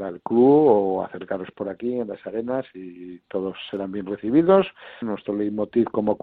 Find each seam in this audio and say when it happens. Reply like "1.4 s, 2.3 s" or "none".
5.0 s